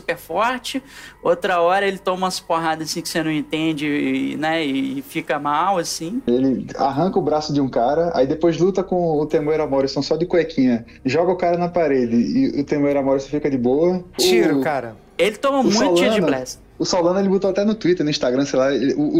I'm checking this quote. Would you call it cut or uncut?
cut